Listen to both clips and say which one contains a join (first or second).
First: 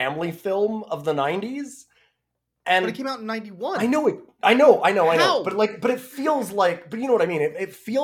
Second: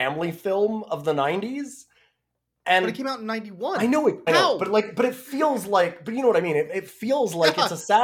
second